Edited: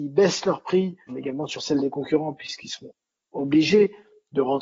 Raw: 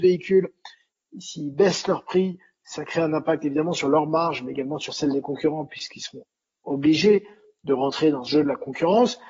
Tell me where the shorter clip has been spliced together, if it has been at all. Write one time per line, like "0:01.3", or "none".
0:01.1